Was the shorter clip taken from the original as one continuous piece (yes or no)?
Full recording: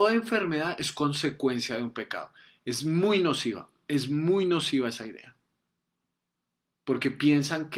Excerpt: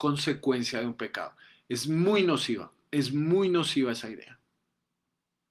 yes